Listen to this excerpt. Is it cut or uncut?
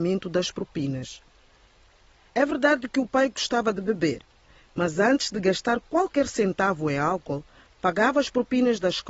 uncut